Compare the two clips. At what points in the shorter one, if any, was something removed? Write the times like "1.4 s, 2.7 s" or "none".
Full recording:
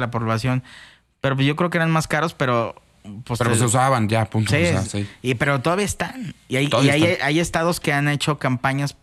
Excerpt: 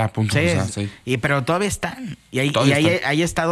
none